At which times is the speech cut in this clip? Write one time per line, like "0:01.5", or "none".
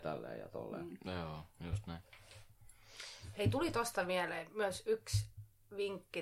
none